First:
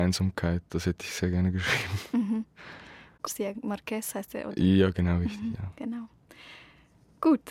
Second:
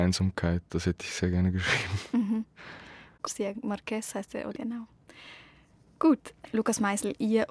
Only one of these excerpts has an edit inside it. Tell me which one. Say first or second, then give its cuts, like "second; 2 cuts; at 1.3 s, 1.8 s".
second; 1 cut; at 4.5 s